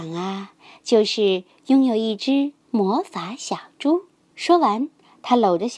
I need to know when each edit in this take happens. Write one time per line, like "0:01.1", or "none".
0:04.2